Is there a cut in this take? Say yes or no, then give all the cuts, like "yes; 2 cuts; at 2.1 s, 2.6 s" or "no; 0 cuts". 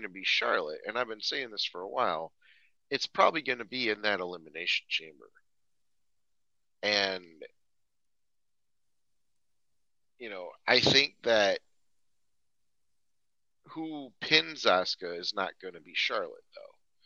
no; 0 cuts